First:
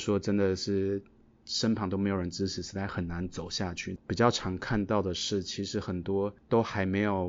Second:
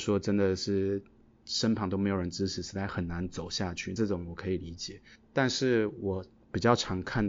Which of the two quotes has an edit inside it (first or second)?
first